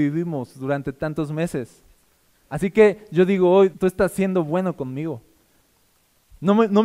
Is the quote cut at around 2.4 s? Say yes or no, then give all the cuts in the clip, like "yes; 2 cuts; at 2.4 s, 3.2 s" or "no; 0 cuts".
yes; 2 cuts; at 2.4 s, 3.7 s